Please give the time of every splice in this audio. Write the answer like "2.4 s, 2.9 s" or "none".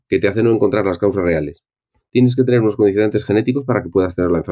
2.0 s